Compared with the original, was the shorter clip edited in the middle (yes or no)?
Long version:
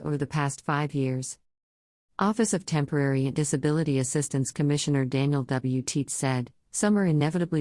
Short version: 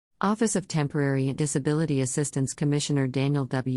no